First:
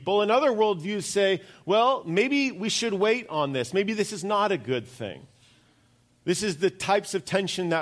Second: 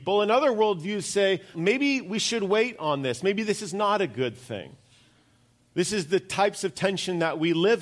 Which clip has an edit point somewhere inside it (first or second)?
second